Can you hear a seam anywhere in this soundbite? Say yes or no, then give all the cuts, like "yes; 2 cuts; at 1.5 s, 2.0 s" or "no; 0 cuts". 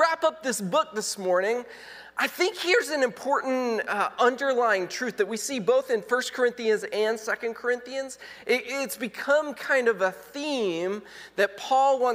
no; 0 cuts